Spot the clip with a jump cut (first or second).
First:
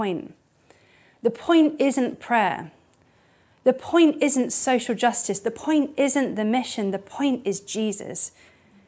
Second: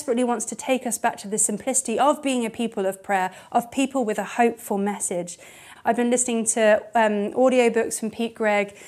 second